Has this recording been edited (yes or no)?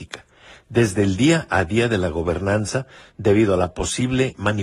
no